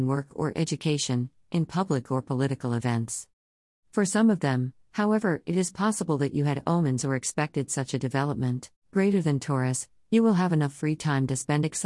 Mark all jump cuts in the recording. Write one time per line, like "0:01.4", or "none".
0:03.8
0:08.8